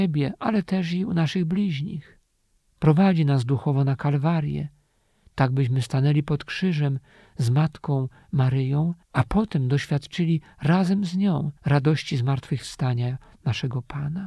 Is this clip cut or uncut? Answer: cut